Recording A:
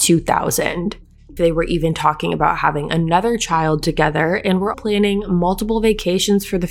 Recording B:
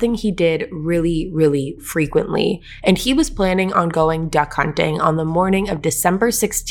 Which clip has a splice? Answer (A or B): A